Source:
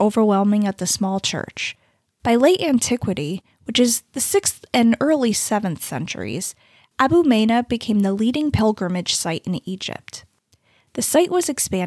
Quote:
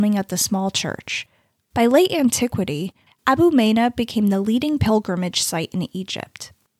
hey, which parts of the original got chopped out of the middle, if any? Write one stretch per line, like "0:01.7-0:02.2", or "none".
0:03.6-0:06.8